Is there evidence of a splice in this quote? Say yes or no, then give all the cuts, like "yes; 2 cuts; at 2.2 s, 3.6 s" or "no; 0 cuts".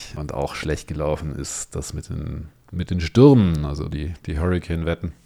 no; 0 cuts